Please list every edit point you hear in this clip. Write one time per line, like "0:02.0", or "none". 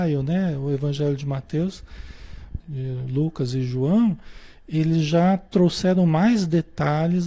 0:02.6